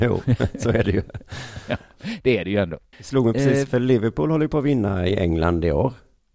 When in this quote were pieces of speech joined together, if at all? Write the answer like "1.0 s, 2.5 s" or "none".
2.9 s